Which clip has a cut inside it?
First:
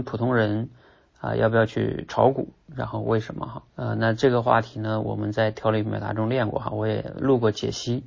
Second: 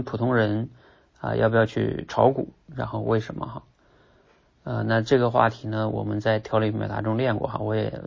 first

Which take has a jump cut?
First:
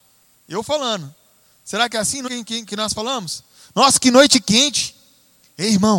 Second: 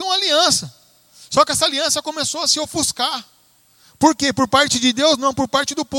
first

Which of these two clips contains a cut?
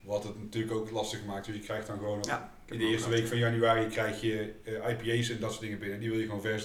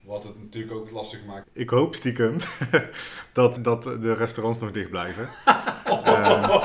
second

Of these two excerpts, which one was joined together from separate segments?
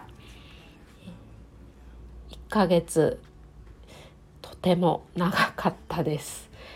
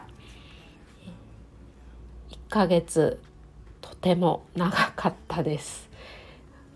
second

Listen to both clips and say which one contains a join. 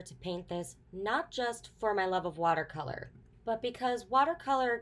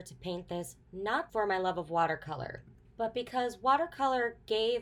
second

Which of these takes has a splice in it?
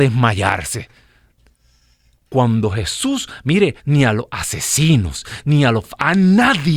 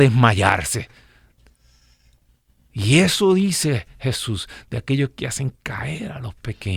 first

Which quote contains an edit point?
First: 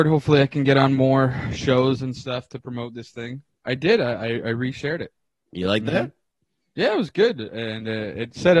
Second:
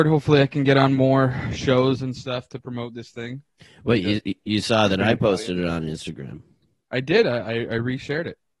first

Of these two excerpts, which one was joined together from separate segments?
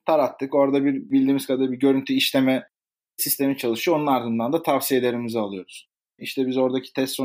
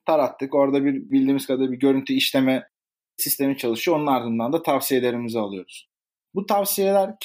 first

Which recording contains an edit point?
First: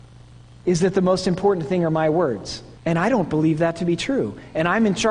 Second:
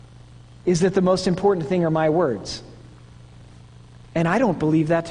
first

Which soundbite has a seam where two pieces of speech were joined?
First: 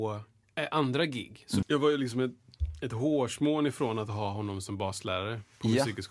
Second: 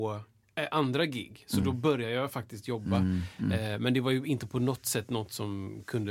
first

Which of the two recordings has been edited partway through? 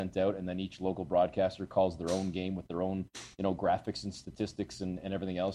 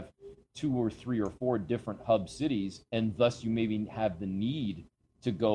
second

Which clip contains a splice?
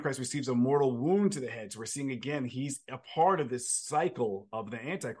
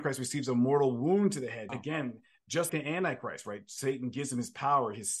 second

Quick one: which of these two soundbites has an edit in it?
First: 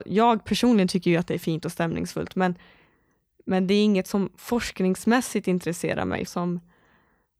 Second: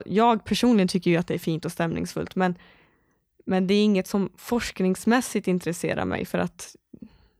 first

